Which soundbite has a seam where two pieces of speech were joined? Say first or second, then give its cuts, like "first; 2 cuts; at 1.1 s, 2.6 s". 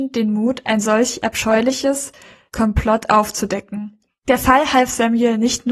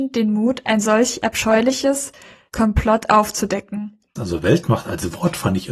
second; 1 cut; at 4.2 s